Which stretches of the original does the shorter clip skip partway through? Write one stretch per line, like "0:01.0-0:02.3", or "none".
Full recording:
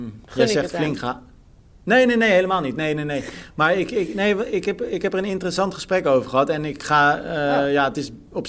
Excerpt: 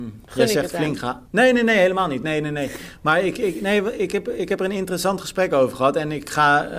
0:01.2-0:01.8

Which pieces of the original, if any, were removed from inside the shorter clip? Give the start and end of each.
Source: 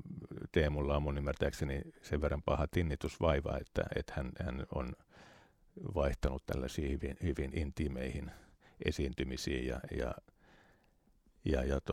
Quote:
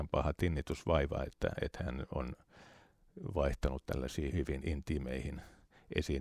0:04.1-0:04.4
0:06.9-0:07.2

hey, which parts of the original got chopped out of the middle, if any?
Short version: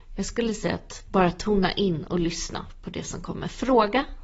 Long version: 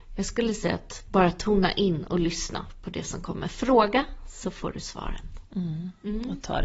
none

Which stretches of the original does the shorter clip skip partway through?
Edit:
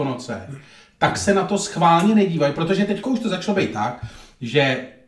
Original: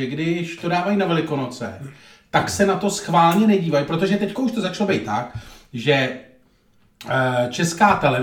none

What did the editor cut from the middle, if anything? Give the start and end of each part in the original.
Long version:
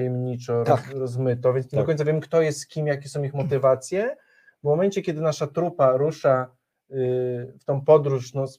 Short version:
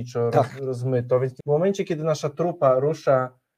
0:01.7-0:04.6

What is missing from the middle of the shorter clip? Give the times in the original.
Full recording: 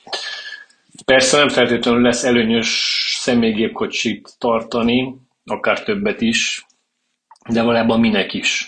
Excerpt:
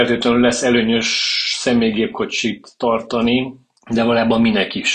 0:05.4-0:07.4

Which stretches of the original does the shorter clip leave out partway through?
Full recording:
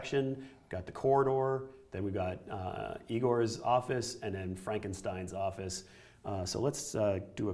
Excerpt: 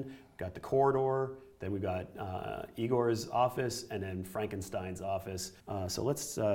0:05.9-0:06.2

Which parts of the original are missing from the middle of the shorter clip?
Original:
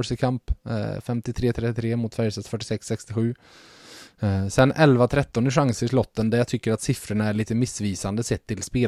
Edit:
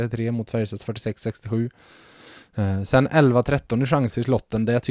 none

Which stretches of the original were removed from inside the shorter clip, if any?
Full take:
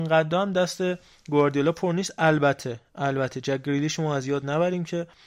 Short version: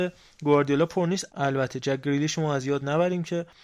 0:02.1-0:02.9

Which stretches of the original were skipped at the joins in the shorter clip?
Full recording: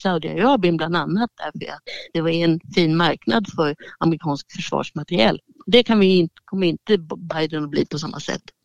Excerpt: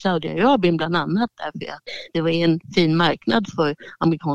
none

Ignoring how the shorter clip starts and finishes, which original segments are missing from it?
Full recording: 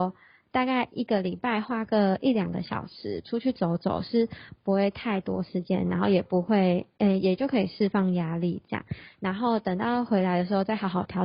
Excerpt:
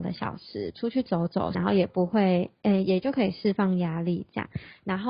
0:04.0-0:05.9

